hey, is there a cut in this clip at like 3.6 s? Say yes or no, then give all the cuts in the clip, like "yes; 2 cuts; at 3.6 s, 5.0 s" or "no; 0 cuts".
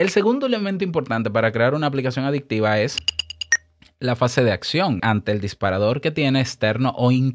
no; 1 cut; at 5.0 s